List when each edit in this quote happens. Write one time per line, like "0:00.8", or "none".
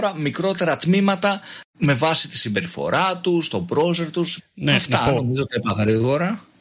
0:04.4